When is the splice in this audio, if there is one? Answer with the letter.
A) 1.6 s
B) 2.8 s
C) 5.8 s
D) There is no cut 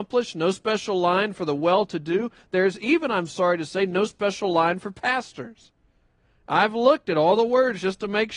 D